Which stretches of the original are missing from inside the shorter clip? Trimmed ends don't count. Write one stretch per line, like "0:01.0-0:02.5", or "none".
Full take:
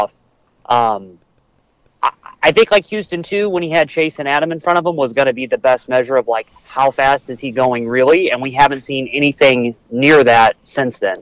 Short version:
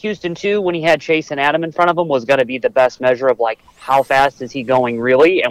none